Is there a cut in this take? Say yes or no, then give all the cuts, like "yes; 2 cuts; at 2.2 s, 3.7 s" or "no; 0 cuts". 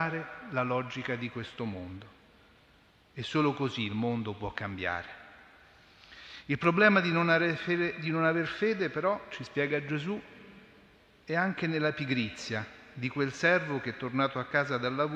no; 0 cuts